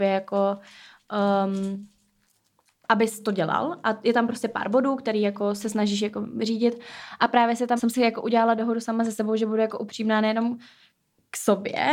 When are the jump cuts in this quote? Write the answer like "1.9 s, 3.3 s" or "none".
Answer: 7.8 s